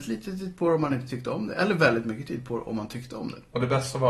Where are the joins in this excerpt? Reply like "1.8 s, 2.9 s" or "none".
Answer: none